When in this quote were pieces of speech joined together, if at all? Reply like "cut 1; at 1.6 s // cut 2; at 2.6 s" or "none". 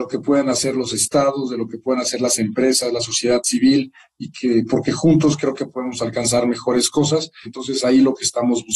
cut 1; at 7.5 s